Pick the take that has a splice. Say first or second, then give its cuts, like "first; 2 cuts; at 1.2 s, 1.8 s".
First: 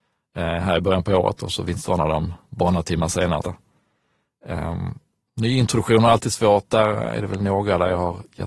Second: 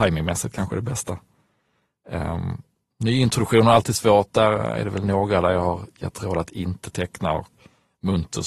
first; 1 cut; at 3.4 s